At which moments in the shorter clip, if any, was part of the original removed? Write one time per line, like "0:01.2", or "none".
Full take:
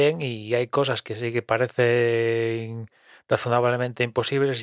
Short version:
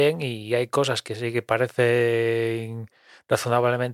none

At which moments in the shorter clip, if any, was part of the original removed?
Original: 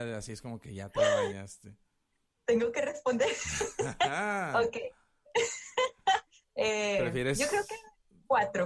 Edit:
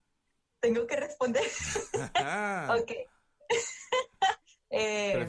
none

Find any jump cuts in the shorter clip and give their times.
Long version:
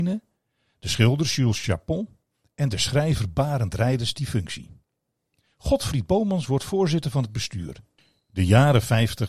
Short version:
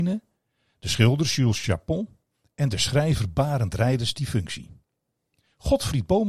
none

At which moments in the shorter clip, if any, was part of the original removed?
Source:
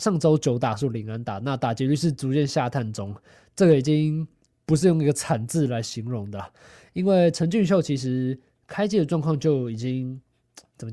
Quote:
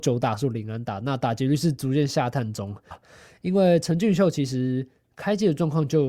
0:02.9

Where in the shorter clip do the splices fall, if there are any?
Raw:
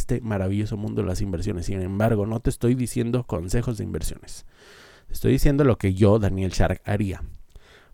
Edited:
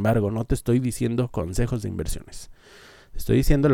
none

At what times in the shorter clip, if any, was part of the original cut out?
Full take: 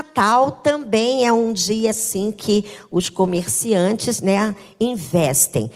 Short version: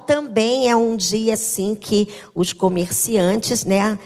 none

